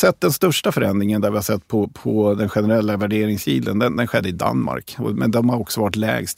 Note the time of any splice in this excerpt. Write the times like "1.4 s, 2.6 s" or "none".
none

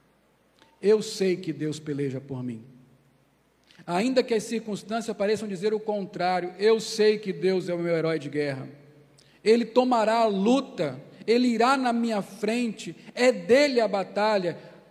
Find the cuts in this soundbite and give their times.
none

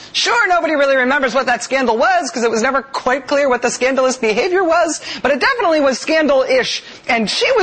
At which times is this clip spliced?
none

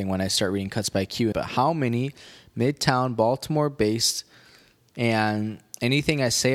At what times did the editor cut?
1.3 s, 4.9 s

